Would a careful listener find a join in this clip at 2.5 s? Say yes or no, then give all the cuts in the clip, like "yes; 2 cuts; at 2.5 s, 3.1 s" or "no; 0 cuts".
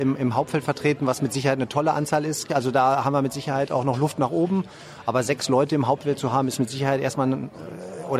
yes; 1 cut; at 2.5 s